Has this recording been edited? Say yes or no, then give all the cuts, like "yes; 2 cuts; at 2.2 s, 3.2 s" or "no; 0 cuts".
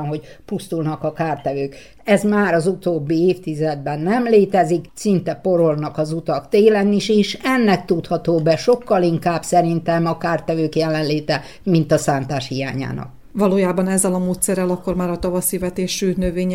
no; 0 cuts